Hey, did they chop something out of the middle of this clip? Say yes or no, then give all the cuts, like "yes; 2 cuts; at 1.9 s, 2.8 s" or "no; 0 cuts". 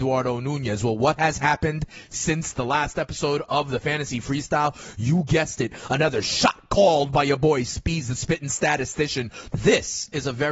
yes; 1 cut; at 9.5 s